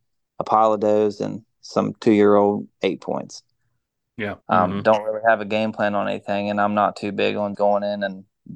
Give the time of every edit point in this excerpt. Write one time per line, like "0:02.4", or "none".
0:04.4
0:07.5